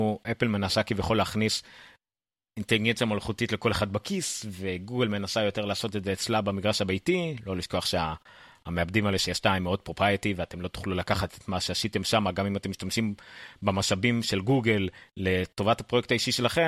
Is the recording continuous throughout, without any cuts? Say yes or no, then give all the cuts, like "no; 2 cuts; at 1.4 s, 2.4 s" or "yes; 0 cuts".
yes; 0 cuts